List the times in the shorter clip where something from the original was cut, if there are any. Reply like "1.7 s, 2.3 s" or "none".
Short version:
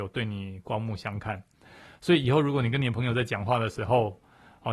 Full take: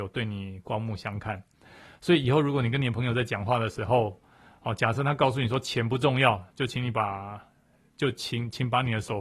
none